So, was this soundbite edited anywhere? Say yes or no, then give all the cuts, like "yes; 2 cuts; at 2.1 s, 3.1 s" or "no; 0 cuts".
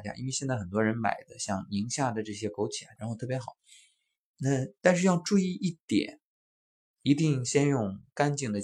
yes; 1 cut; at 3.0 s